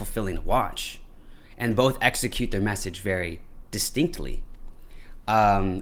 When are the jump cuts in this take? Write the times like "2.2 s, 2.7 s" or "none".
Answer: none